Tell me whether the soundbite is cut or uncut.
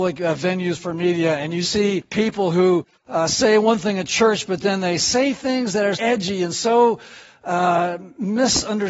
cut